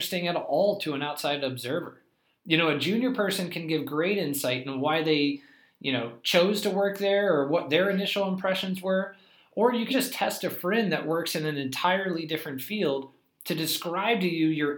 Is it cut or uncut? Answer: cut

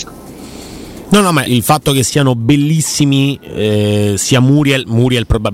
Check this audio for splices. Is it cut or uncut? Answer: cut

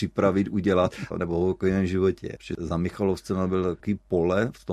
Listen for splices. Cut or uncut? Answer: cut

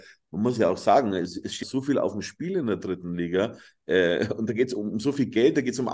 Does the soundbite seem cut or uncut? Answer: cut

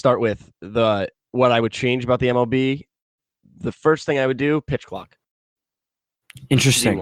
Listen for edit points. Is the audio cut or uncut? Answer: uncut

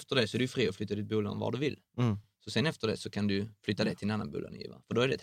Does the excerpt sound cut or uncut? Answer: uncut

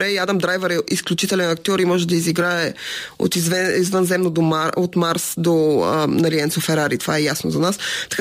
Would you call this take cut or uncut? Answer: uncut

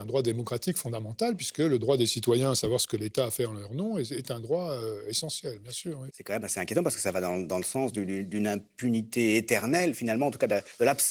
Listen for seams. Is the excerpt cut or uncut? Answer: cut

